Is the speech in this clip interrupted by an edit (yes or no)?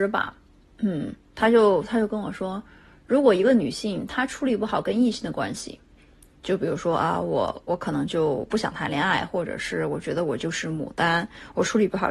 no